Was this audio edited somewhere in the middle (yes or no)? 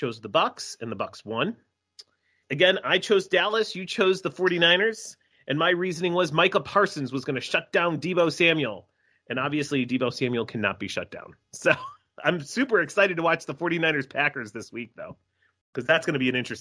yes